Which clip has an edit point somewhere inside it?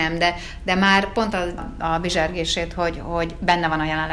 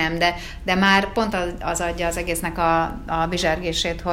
first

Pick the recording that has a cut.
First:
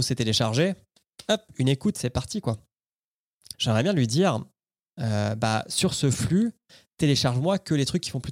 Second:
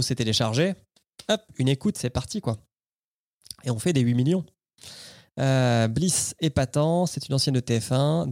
first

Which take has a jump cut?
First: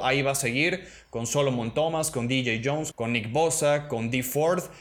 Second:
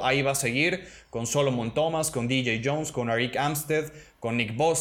first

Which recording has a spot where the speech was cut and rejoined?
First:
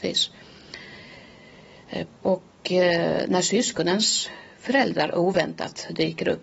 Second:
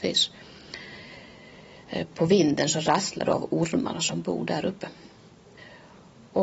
first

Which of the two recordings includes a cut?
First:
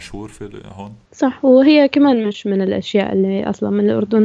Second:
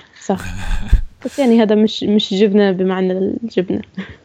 first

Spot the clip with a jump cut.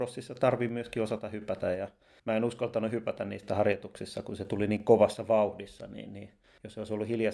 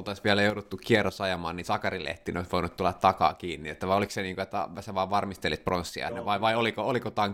second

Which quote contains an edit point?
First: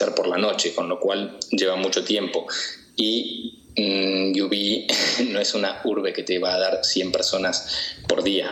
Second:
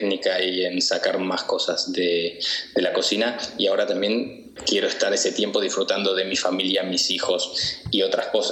second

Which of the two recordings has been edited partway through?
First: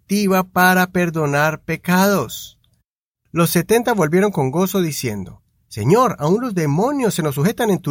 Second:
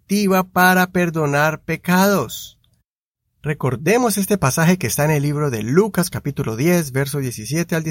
first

